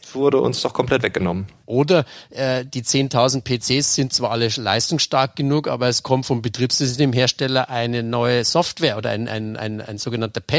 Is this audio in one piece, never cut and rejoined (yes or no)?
no